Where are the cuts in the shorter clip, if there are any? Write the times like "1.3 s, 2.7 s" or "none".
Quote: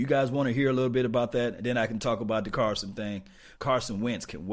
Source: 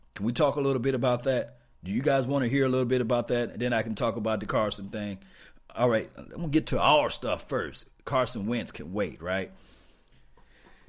3.6 s